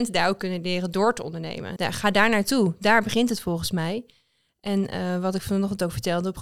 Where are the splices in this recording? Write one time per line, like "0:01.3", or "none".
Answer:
0:01.8